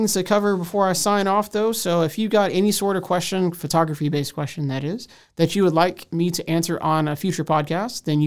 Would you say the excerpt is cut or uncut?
uncut